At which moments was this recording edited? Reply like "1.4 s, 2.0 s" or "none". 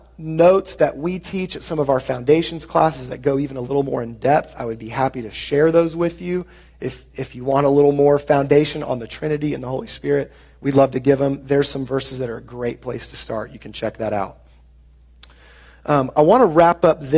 none